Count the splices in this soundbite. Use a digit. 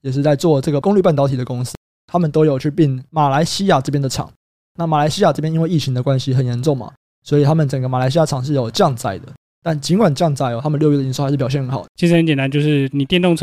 1